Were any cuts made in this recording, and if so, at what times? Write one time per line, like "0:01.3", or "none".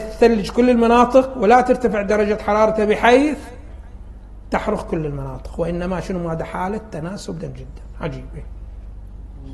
0:07.4